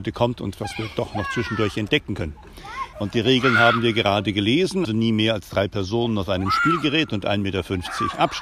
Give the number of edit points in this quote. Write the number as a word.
two